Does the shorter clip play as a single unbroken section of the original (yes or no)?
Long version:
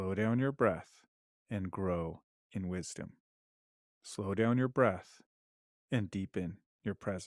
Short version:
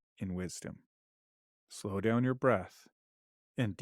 yes